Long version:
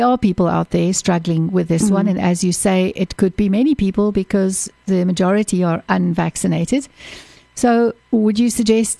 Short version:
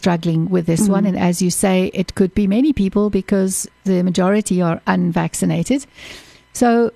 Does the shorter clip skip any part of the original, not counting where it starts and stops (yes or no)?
no